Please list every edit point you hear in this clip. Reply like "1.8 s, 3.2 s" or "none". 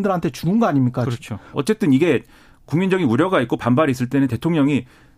1.5 s